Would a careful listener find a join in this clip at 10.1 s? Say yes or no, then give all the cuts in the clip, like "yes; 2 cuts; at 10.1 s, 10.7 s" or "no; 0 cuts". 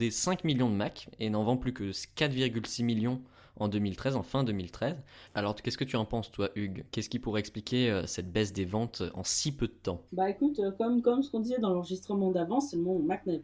yes; 2 cuts; at 5.3 s, 10.1 s